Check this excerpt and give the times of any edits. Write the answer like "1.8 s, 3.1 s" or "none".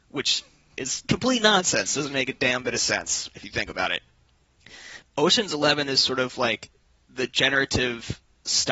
5.0 s